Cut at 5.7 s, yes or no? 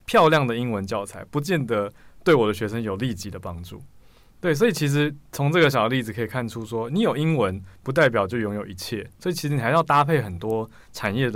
yes